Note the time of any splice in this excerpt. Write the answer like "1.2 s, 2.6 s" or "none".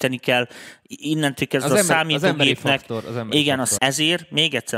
3.8 s